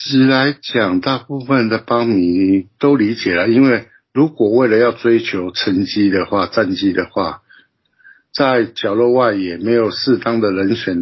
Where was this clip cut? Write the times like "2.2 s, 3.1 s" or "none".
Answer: none